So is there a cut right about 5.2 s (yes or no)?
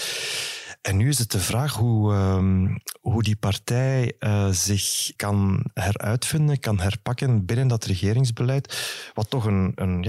yes